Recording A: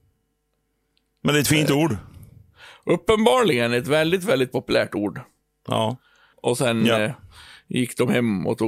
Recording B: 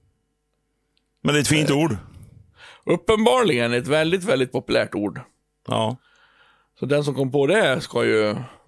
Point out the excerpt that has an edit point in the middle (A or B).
A